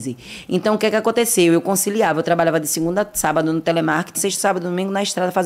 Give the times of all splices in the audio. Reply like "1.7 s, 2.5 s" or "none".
4.1 s